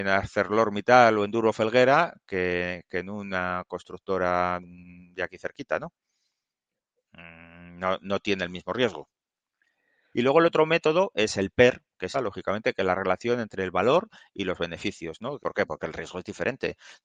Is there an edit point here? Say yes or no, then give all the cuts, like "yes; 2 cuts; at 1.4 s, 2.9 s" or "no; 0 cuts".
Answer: yes; 3 cuts; at 10.1 s, 12.1 s, 15.4 s